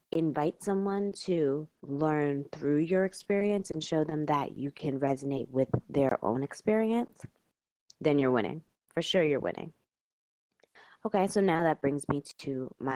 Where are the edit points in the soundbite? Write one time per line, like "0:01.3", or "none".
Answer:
none